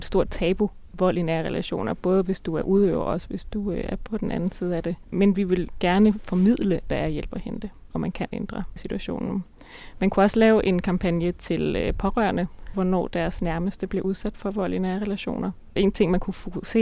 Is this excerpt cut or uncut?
cut